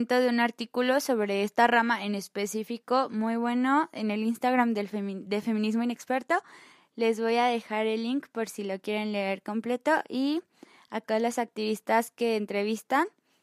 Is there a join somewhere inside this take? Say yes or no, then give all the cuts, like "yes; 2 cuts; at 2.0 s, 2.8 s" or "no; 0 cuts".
no; 0 cuts